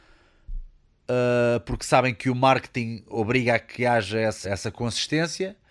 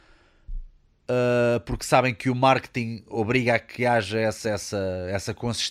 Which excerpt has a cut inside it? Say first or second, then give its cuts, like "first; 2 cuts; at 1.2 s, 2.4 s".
first; 1 cut; at 4.4 s